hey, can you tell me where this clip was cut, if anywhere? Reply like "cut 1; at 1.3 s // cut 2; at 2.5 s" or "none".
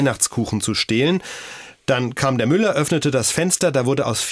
none